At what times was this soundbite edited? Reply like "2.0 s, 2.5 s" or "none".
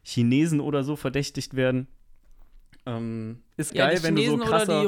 3.7 s